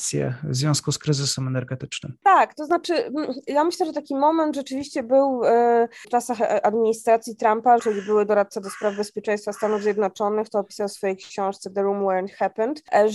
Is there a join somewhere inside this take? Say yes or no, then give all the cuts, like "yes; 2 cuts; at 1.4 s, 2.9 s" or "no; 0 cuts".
yes; 2 cuts; at 6.0 s, 7.8 s